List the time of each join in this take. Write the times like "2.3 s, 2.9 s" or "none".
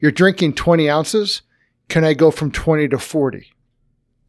none